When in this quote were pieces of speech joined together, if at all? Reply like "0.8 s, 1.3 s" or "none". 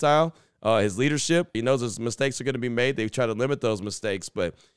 1.5 s